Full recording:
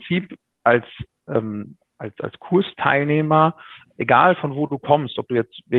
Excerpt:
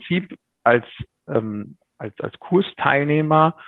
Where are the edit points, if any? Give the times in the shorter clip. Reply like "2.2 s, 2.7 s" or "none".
none